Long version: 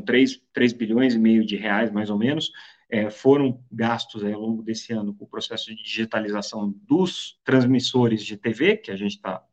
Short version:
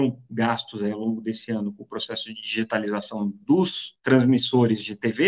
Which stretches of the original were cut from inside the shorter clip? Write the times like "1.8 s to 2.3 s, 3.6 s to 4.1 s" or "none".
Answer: none

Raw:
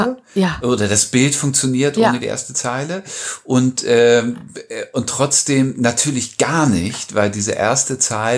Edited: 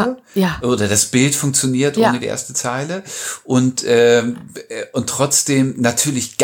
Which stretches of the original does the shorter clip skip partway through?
none

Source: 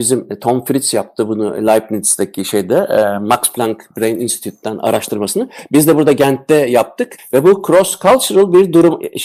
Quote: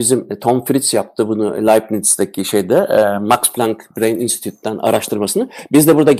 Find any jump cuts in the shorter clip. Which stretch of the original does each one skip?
none

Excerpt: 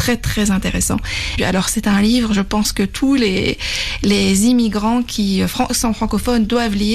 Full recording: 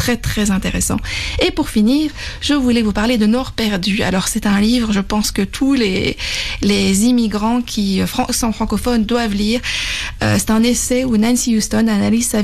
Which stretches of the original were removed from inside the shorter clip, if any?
1.4 s to 4.0 s

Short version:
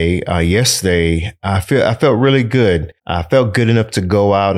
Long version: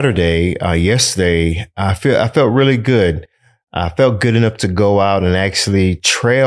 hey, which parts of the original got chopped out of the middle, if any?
3.3 s to 3.6 s

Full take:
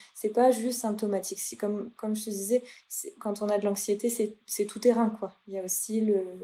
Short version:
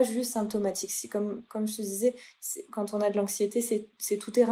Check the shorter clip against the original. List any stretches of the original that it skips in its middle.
none

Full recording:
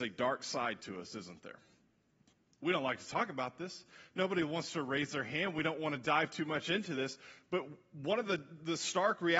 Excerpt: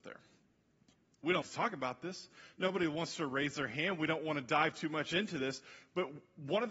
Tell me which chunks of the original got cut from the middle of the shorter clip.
2.8 s to 3.0 s

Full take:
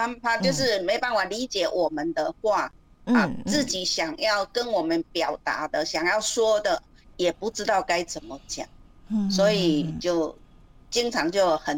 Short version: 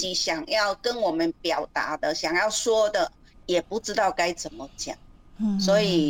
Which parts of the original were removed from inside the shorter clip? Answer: none

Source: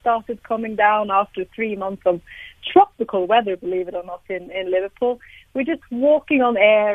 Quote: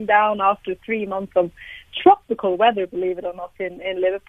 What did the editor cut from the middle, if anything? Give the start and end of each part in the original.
none

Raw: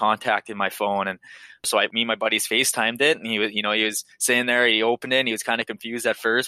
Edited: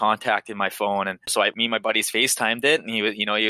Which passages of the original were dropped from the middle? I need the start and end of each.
1.2 s to 1.6 s

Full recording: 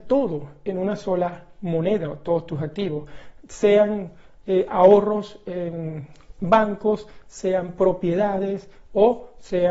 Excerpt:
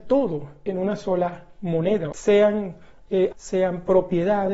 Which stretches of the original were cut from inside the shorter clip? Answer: 2.1 s to 3.5 s, 4.7 s to 7.2 s

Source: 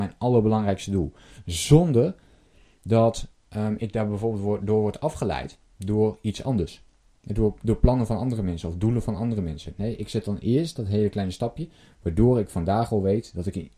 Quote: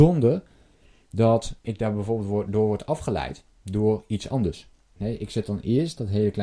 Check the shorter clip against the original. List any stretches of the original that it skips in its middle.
3.4 s to 3.8 s, 7.1 s to 9.7 s

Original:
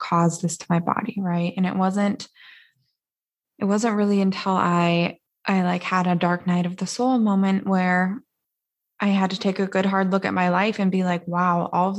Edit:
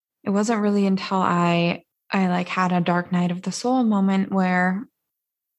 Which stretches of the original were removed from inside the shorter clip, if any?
none

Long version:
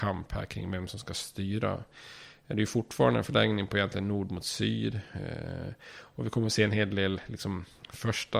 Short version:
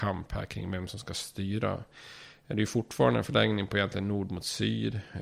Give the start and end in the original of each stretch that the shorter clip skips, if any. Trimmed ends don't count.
none

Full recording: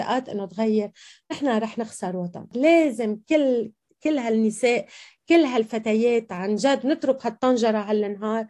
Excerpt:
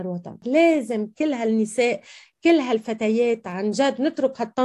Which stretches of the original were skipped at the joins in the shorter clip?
3.2 s to 4.0 s

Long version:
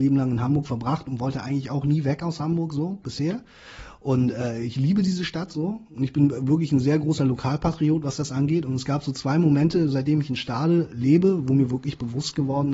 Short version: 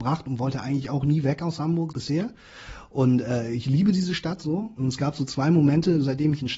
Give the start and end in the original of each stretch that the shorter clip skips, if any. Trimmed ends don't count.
2.7 s to 3.0 s, 5.9 s to 8.6 s

